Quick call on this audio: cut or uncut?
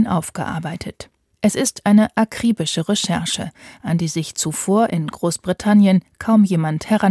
uncut